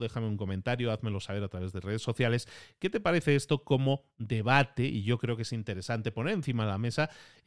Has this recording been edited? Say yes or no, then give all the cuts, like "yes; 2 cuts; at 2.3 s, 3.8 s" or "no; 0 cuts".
no; 0 cuts